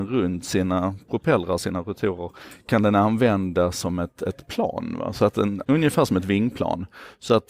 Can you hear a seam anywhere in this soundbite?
yes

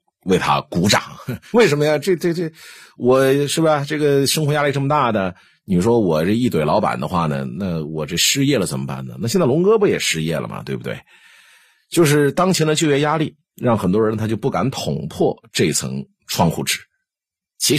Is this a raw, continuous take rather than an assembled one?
no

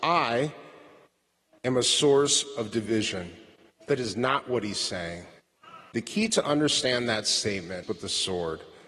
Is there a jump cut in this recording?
yes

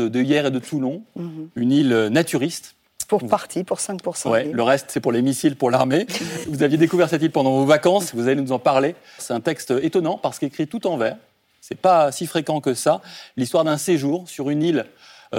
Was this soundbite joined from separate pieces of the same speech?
yes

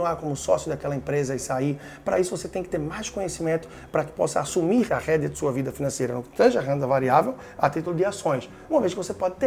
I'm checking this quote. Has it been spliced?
yes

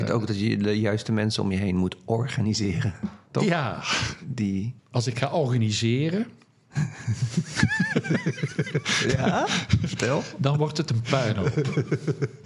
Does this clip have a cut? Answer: yes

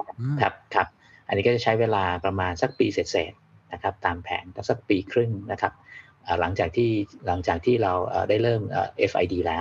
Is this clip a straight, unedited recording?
yes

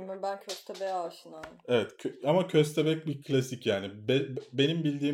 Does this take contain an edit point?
no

